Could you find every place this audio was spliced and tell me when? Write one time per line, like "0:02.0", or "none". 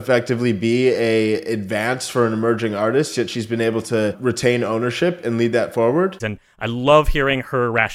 0:06.2